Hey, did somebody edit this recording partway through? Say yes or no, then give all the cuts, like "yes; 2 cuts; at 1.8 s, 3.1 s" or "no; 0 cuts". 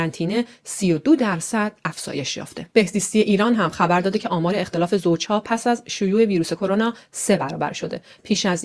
yes; 1 cut; at 2.7 s